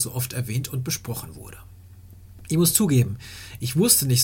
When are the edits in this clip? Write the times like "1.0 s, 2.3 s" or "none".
none